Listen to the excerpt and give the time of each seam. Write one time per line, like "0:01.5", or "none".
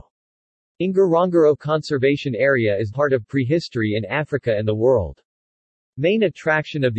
0:02.9